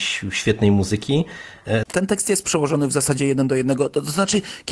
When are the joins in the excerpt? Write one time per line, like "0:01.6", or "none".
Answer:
0:01.8